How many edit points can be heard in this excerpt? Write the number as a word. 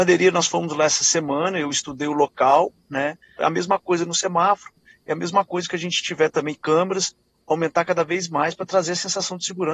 one